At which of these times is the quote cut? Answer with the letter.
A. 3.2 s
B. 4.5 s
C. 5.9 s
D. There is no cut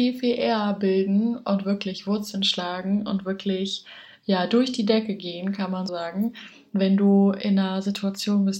C